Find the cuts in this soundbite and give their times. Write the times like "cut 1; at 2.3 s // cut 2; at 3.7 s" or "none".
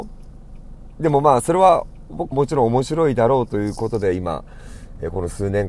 cut 1; at 2.3 s

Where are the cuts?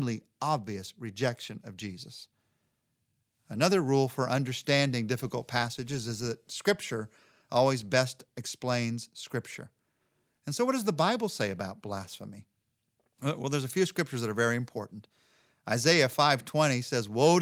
none

